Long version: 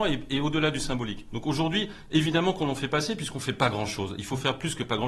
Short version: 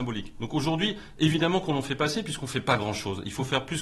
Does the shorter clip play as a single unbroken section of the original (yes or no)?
yes